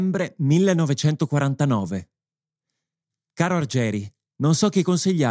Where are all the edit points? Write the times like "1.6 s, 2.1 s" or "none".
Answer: 4.3 s

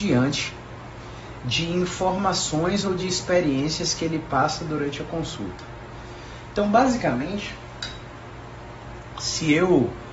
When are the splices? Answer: none

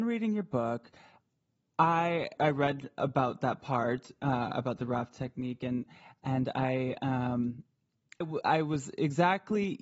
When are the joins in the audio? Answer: 2.4 s, 8.2 s

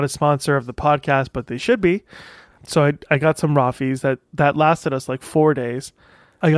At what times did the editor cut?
2.5 s

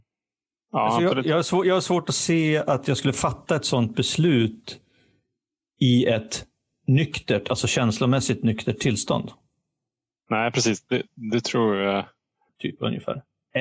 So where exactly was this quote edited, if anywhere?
12.5 s

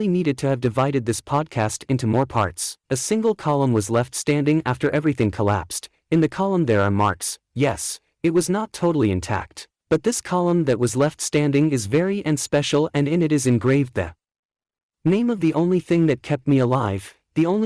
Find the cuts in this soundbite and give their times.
2.8 s

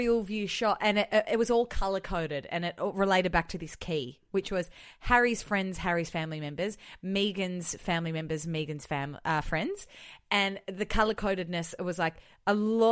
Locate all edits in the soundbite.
none

